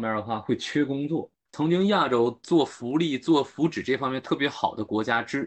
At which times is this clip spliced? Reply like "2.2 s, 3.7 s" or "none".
1.5 s